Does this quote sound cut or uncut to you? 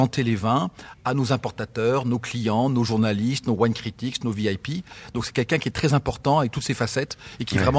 uncut